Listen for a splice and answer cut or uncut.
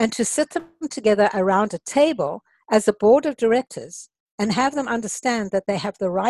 uncut